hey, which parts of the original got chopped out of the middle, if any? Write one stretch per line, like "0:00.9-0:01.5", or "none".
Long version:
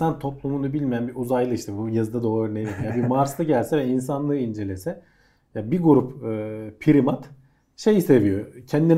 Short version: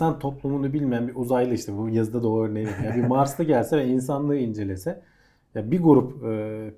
none